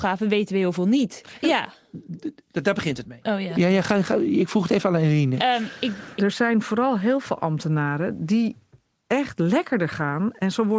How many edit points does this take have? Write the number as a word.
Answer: three